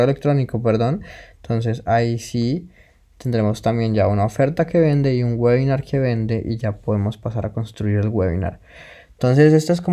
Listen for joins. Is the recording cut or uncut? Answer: uncut